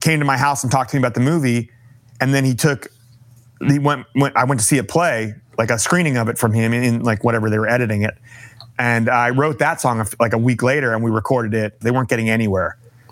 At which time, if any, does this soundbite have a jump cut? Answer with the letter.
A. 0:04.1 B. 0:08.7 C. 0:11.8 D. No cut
C